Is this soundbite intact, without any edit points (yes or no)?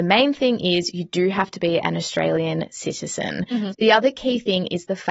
no